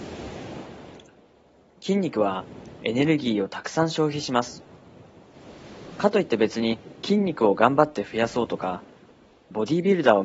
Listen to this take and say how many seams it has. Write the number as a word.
zero